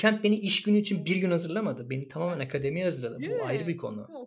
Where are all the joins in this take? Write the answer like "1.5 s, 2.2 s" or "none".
none